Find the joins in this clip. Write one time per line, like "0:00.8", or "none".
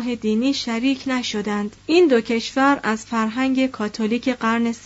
0:01.8